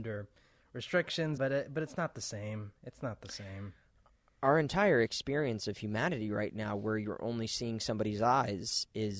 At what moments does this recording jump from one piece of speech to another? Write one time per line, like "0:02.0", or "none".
0:01.4